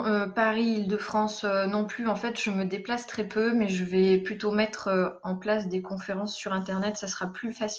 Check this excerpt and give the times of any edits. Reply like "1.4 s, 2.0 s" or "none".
none